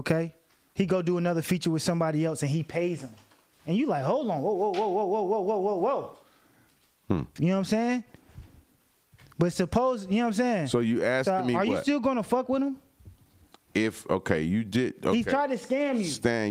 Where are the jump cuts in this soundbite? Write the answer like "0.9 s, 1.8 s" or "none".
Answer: 7.4 s